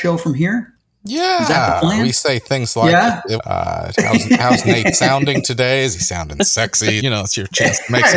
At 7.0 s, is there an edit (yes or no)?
yes